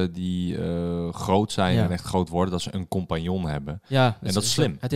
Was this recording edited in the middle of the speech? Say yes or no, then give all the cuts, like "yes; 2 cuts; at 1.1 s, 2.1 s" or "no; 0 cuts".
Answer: no; 0 cuts